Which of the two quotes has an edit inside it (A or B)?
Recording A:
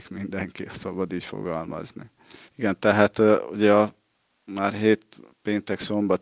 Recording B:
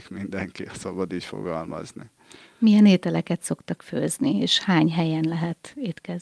A